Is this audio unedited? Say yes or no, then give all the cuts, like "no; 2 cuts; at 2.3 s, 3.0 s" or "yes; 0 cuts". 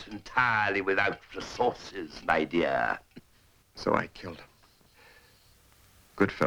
no; 1 cut; at 3.6 s